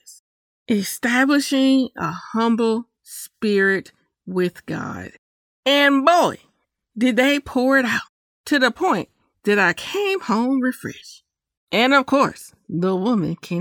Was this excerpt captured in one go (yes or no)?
no